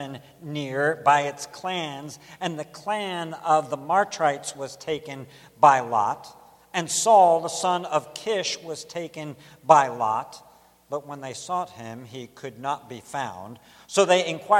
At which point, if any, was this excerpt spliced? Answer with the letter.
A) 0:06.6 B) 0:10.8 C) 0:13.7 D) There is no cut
D